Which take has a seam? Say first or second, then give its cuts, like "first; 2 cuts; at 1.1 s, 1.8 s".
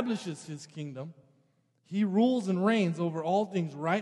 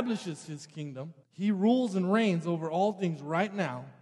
second; 1 cut; at 1.2 s